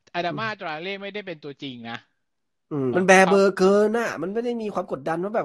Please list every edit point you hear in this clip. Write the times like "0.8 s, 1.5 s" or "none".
2.9 s